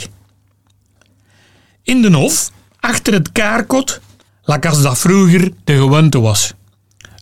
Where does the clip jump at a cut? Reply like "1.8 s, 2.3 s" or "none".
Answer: 4.3 s